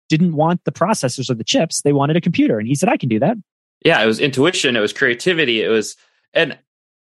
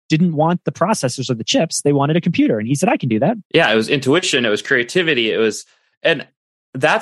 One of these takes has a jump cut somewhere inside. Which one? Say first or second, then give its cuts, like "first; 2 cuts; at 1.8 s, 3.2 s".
second; 1 cut; at 3.4 s